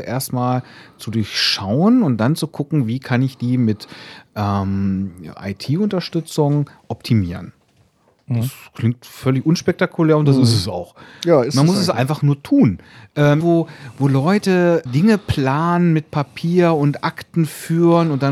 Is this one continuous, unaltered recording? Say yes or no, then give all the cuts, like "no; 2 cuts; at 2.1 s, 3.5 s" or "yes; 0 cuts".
no; 2 cuts; at 13.4 s, 14.9 s